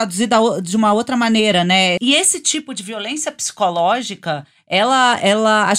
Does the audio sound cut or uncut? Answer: cut